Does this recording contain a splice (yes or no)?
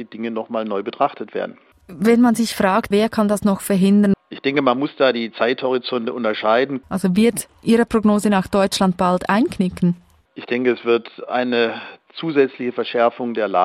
yes